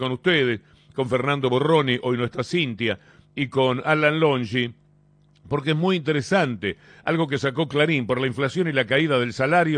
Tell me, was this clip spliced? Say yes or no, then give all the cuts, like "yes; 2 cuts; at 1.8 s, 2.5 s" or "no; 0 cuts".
no; 0 cuts